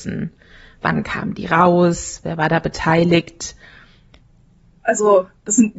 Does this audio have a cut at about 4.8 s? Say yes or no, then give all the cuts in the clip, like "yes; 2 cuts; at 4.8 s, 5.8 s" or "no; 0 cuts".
yes; 1 cut; at 4.8 s